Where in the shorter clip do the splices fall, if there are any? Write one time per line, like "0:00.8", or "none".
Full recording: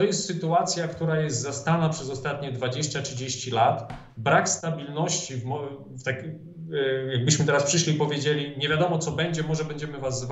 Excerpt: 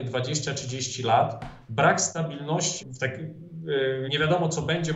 0:02.8
0:04.0

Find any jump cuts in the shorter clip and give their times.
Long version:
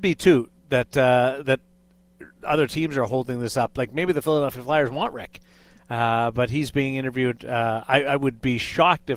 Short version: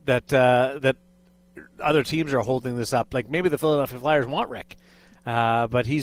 none

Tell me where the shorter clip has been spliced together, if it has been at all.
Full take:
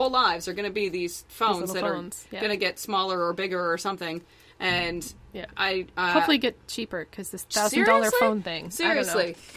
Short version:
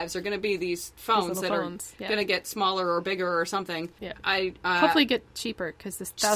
0:04.0

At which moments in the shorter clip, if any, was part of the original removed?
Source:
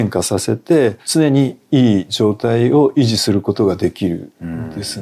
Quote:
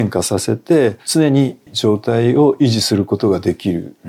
0:01.7

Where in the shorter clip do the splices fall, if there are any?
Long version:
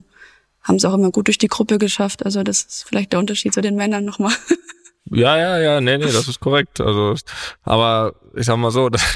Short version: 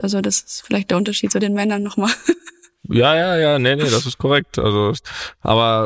none

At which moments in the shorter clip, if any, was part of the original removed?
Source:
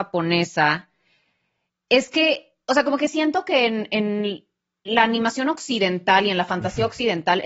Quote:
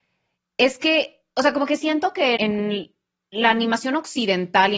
0:02.4

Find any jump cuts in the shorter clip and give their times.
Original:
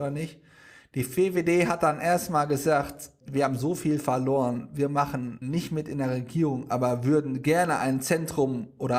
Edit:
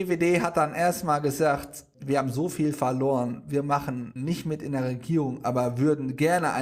none

